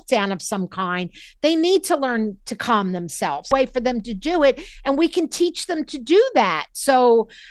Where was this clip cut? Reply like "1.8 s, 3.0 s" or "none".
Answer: 3.5 s